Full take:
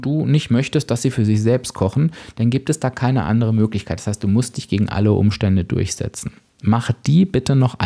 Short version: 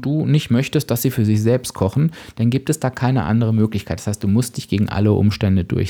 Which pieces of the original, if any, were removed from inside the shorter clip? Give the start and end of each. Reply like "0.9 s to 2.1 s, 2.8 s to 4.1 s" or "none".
none